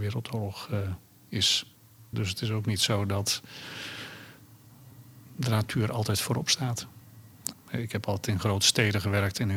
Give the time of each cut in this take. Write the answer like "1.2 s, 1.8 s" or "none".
2.1 s, 7.5 s